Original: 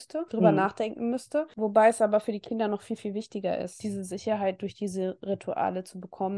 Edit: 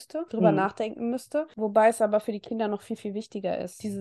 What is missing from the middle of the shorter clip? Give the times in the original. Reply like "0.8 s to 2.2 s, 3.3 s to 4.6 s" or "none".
none